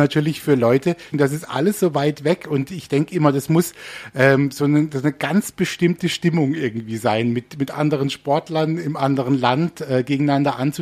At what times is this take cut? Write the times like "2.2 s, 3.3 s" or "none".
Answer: 1.1 s